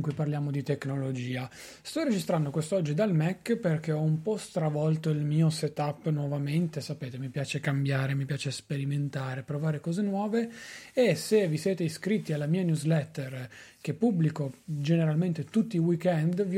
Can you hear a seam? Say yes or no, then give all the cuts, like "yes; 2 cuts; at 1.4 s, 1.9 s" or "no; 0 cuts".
no; 0 cuts